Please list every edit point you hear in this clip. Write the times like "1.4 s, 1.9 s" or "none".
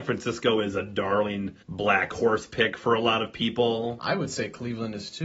1.6 s